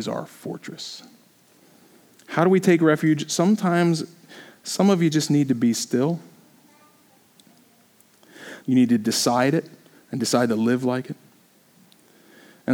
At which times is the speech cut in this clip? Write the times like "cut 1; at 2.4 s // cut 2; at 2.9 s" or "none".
cut 1; at 8.6 s

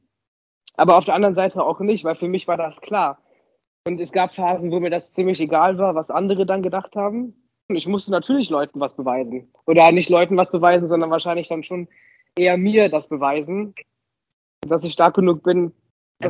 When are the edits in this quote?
cut 1; at 7.7 s

